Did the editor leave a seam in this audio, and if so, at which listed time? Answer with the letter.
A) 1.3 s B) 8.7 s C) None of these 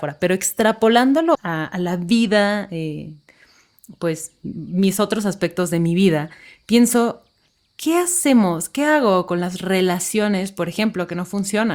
A